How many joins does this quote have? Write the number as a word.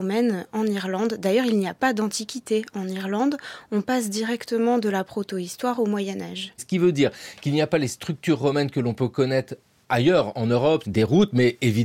two